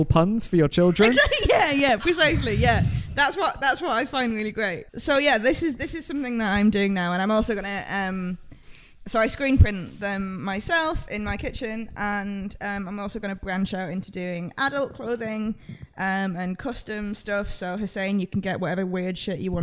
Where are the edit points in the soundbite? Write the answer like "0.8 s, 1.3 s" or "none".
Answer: 4.9 s